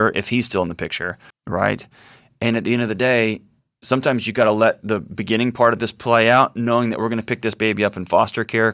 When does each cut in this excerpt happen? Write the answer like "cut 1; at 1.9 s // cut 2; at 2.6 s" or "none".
cut 1; at 1.3 s

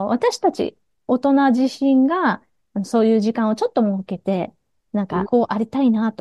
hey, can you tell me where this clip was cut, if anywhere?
cut 1; at 5.2 s

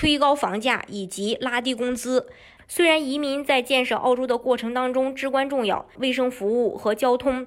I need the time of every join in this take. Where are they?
cut 1; at 2.6 s // cut 2; at 6.0 s

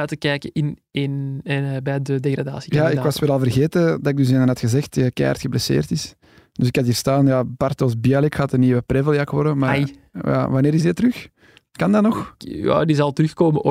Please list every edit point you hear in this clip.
none

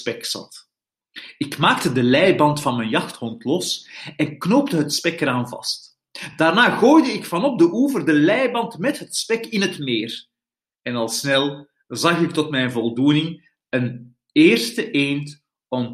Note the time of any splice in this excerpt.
none

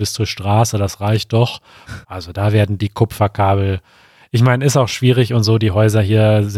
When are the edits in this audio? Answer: cut 1; at 2.0 s

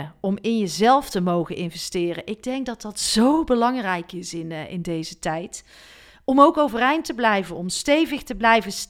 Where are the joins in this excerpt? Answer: none

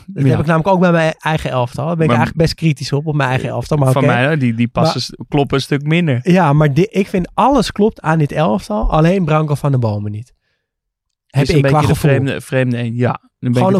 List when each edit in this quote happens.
none

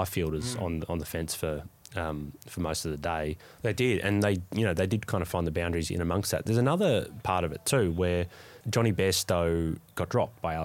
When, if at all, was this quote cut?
cut 1; at 3.6 s // cut 2; at 8.6 s

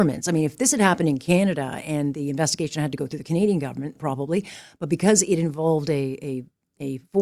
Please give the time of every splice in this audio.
cut 1; at 4.0 s

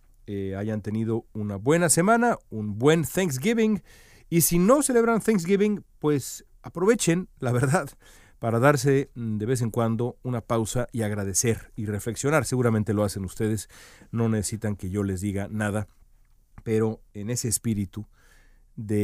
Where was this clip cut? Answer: none

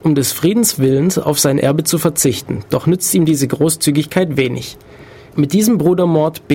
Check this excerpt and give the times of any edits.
cut 1; at 5.3 s

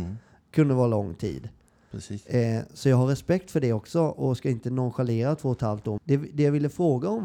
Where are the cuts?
cut 1; at 6.0 s

